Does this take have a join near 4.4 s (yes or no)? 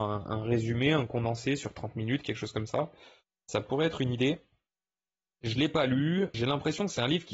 no